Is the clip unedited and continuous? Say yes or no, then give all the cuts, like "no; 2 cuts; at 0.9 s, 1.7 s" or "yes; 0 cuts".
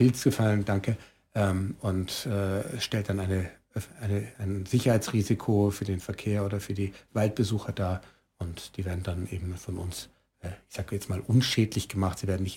no; 1 cut; at 4.3 s